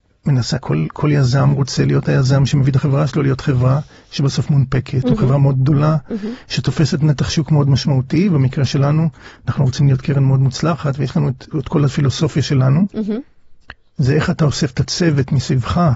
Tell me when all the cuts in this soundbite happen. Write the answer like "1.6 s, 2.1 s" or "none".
11.5 s